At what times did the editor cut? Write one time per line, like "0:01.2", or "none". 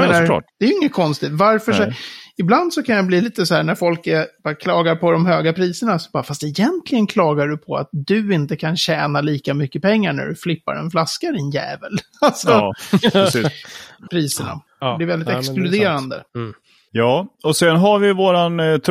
0:14.1